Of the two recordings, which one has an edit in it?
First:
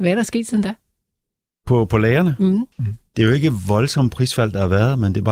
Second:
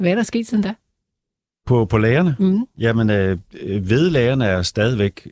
first; 1 cut; at 2.7 s

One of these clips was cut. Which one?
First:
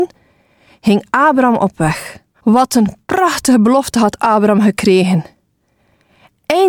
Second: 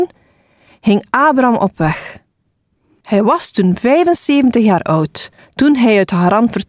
first; 1 cut; at 2.3 s

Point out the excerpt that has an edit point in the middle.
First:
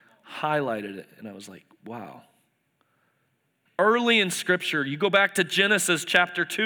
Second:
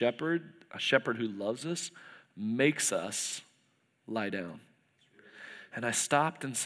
first; 1 cut; at 3.7 s

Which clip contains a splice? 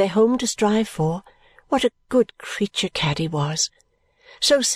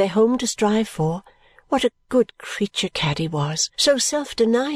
second; 1 cut; at 3.7 s

